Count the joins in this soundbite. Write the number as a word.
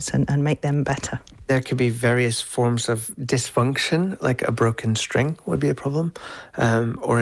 zero